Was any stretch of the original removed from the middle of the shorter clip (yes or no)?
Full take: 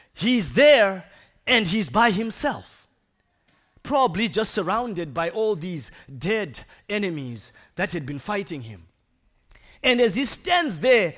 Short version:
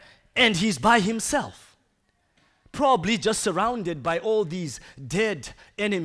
no